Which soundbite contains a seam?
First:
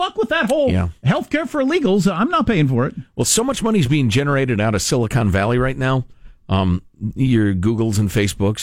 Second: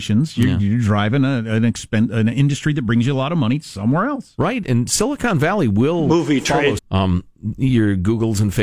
second; 1 cut; at 6.8 s

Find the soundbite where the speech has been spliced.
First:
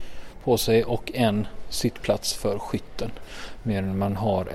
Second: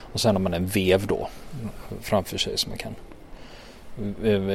first; 1 cut; at 3.5 s

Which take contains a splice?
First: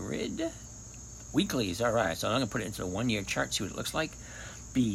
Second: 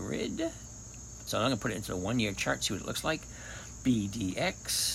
second; 1 cut; at 1.3 s

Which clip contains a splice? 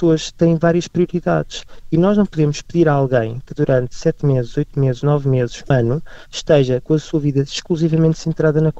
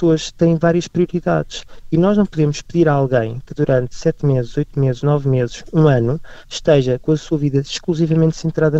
first; 1 cut; at 5.7 s

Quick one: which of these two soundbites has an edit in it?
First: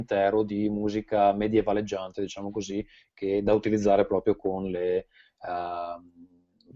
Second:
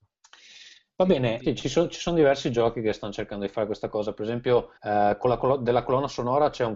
second; 2 cuts; at 1.4 s, 4.8 s

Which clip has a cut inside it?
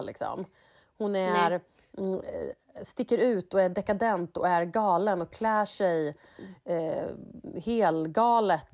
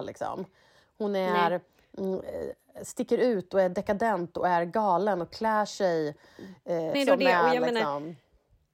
second; 1 cut; at 6.9 s

